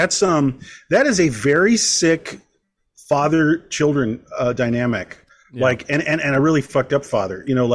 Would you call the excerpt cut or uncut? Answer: uncut